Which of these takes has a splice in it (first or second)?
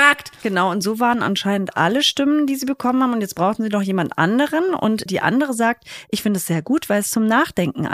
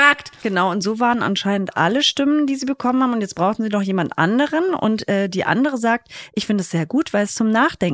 first